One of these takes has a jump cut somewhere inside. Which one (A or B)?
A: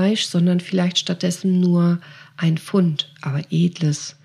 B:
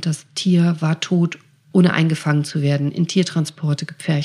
B